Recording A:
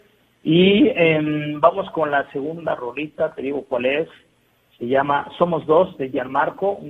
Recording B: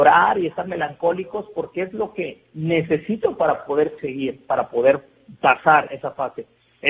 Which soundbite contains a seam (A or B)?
B